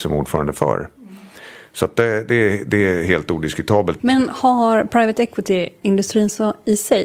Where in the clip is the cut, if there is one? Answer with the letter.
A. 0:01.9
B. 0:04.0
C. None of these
B